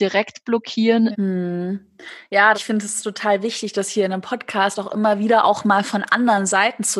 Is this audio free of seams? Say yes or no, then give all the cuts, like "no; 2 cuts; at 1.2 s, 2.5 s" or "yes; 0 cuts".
no; 2 cuts; at 1.1 s, 2.5 s